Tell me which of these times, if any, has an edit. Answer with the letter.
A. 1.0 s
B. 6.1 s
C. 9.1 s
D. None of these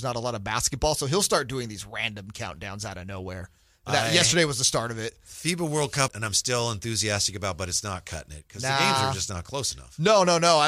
B